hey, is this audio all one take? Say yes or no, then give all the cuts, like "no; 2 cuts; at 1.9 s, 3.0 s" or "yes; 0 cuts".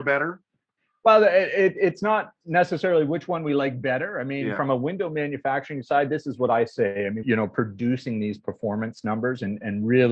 no; 1 cut; at 7.2 s